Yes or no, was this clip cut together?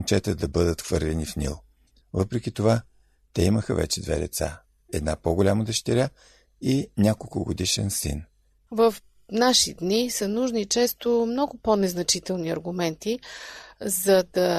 yes